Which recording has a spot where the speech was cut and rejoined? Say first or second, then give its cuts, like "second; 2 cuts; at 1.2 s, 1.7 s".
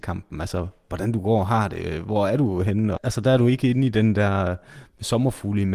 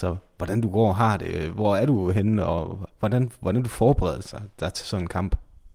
first; 1 cut; at 3.0 s